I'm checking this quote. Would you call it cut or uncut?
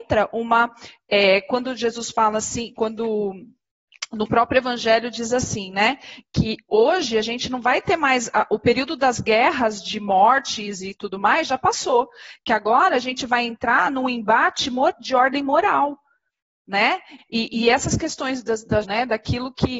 cut